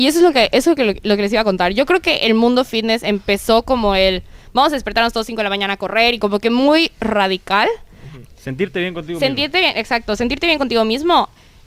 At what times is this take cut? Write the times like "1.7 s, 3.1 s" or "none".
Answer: 8.3 s

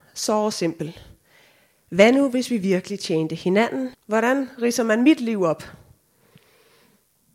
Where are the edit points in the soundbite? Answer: 3.9 s

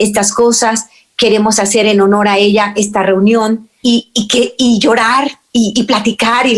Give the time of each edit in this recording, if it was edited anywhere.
3.8 s

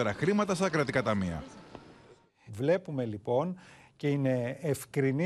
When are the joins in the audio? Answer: 2.5 s

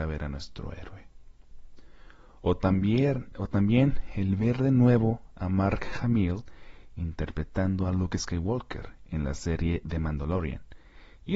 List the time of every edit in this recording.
none

